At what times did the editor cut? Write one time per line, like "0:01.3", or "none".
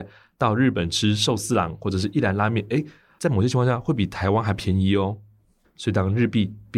0:05.6